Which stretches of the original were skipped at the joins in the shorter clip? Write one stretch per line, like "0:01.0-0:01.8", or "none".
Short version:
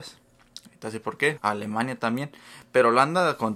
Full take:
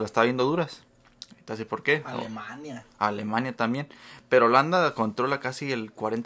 0:02.0-0:02.9